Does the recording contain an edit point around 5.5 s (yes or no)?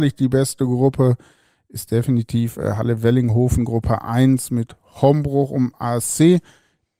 no